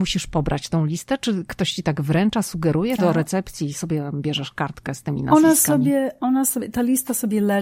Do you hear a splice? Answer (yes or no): yes